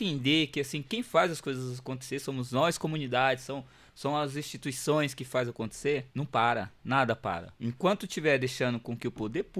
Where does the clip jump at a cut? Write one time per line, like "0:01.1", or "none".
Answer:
0:06.1
0:07.6

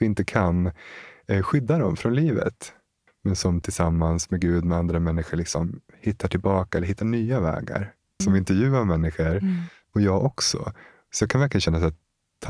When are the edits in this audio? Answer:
0:03.1
0:08.2

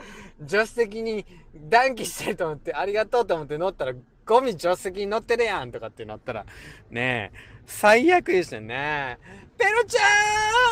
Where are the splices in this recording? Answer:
none

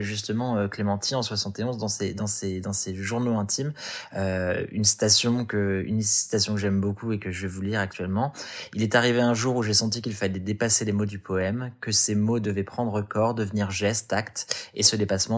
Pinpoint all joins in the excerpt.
none

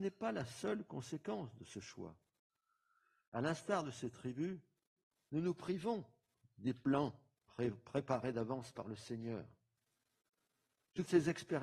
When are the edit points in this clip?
0:05.2

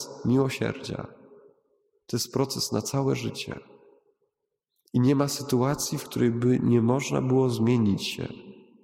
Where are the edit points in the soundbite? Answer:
none

